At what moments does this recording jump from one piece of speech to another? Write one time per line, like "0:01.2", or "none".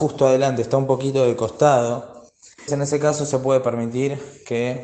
0:02.7